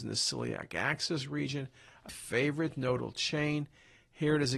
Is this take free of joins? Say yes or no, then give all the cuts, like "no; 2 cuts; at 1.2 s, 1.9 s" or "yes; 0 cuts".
no; 1 cut; at 2.1 s